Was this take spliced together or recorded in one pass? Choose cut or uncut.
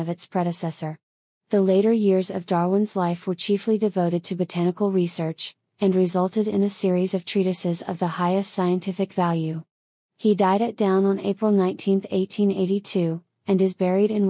uncut